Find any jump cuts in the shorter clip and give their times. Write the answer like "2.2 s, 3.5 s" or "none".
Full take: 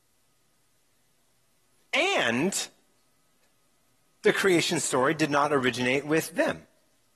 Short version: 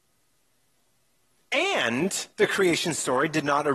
2.3 s